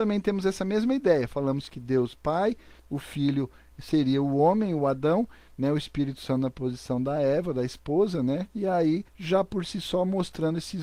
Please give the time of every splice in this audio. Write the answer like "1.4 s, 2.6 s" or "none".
8.5 s